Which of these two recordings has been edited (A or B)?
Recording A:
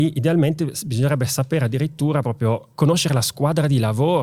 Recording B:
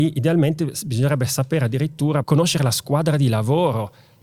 B